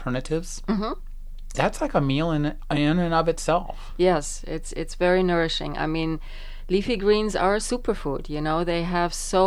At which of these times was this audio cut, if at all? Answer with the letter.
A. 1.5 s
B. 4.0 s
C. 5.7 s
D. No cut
A